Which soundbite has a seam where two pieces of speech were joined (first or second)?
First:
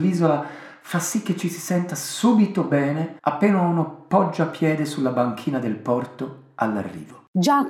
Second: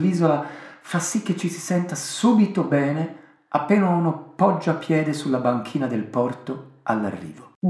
first